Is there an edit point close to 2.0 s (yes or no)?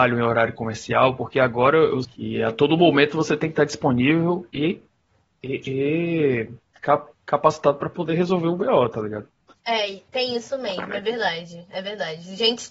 yes